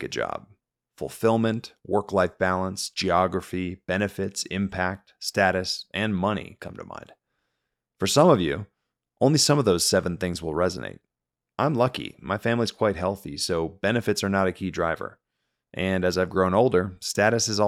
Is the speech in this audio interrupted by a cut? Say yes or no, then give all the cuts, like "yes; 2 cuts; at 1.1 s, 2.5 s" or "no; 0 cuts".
no; 0 cuts